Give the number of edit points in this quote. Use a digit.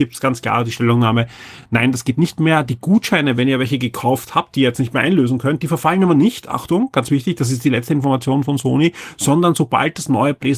0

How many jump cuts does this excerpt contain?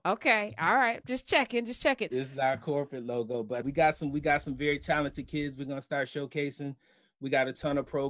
1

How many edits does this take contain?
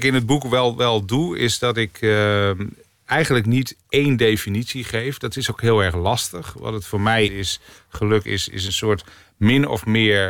1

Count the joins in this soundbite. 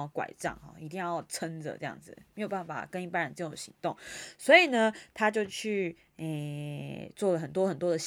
0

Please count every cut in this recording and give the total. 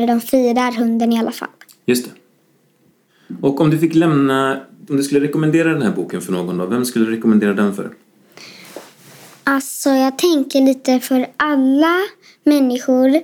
0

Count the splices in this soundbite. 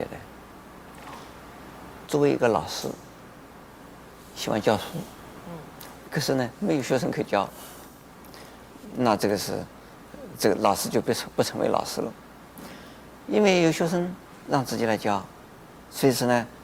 1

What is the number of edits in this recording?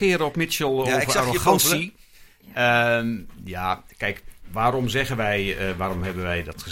0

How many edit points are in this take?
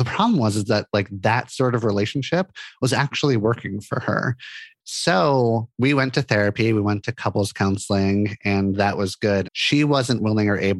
2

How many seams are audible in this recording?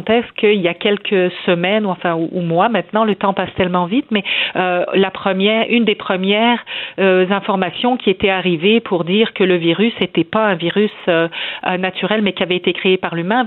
0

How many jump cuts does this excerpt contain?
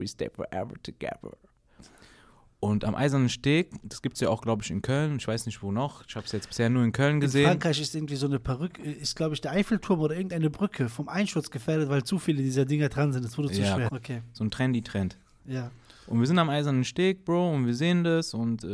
1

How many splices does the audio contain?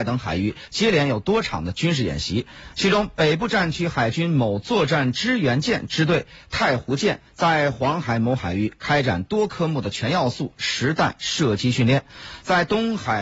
0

